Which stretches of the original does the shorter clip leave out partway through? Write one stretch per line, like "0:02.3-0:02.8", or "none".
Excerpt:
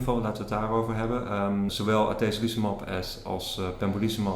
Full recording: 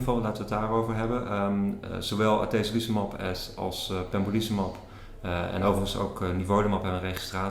0:01.7-0:02.0